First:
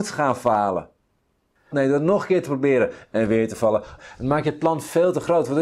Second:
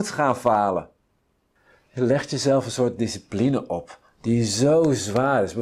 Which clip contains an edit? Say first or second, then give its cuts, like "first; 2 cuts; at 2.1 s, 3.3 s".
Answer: first; 2 cuts; at 1.7 s, 4.0 s